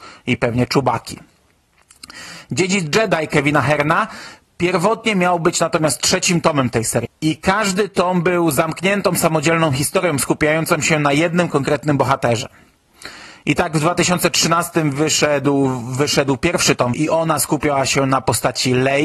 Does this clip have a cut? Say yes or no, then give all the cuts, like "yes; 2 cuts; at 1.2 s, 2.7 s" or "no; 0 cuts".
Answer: yes; 2 cuts; at 7.1 s, 16.9 s